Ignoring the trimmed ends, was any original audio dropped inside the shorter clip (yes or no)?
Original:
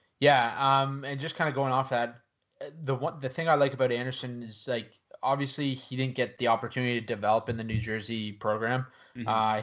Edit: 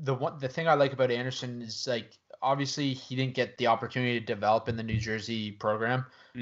no